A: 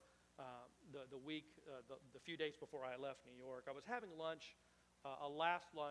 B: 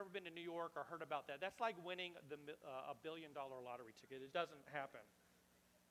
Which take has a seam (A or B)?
B